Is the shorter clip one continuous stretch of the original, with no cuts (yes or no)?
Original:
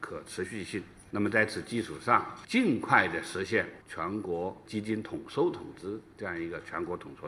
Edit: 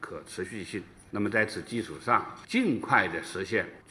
yes